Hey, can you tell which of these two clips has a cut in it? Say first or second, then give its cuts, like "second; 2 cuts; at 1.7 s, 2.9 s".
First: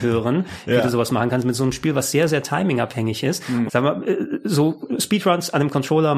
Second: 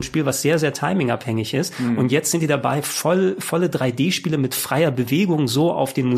first; 1 cut; at 3.7 s